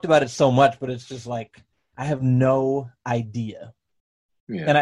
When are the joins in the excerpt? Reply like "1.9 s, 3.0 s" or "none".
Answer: none